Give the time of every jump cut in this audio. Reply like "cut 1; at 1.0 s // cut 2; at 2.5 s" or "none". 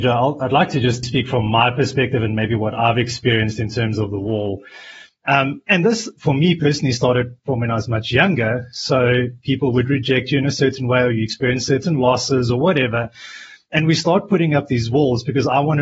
cut 1; at 1.0 s // cut 2; at 5.1 s